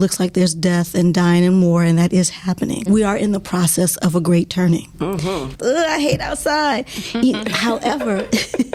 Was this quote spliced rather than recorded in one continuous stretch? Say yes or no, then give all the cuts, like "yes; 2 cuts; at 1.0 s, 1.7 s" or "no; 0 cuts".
yes; 2 cuts; at 2.9 s, 5.5 s